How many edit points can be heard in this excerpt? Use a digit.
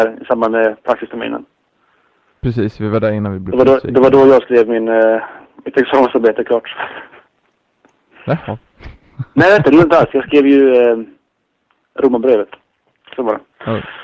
0